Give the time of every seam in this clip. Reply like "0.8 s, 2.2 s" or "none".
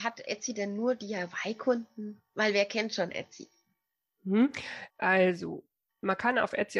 none